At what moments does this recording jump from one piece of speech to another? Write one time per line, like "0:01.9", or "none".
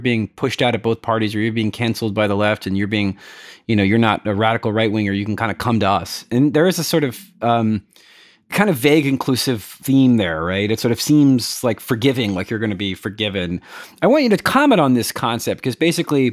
none